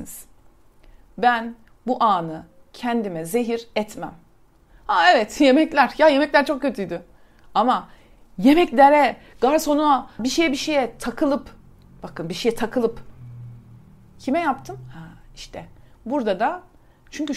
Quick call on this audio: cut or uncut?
cut